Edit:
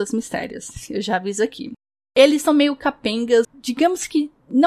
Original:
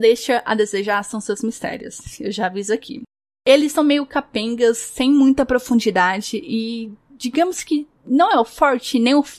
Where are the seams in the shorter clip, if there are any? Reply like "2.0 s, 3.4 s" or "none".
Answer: 3.4 s